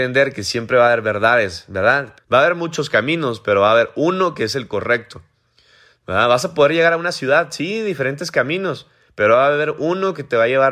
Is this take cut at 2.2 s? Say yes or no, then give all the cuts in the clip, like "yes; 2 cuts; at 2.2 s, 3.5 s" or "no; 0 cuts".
yes; 1 cut; at 2.2 s